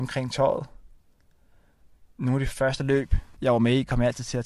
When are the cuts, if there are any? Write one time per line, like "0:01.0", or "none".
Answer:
0:03.4